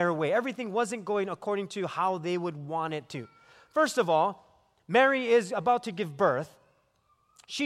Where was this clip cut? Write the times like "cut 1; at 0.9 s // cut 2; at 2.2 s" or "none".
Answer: none